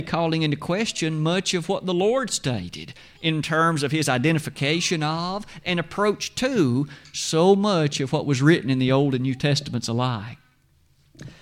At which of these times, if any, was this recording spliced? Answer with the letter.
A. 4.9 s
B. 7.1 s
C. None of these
C